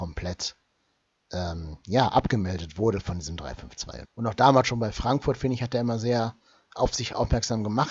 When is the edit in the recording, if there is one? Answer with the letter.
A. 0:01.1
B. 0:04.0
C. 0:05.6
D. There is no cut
B